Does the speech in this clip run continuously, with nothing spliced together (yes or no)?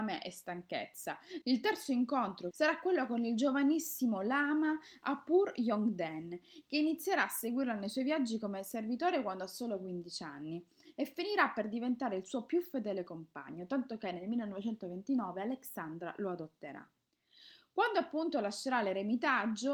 no